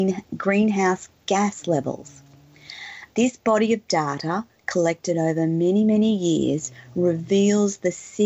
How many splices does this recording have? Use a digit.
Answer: 1